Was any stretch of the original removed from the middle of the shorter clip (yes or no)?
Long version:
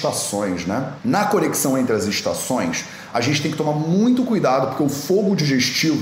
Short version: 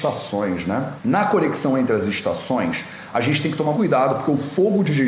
yes